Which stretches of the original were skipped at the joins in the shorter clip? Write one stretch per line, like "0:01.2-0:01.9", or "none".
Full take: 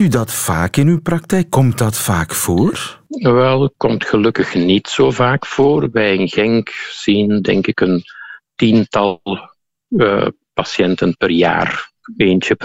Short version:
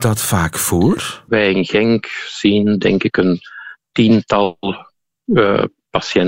0:03.0-0:05.9